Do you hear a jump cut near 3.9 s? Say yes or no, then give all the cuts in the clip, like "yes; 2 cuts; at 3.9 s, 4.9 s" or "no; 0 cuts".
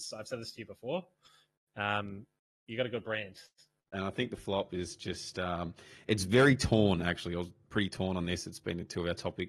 yes; 1 cut; at 3.9 s